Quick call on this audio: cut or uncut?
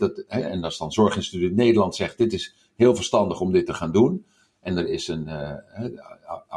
uncut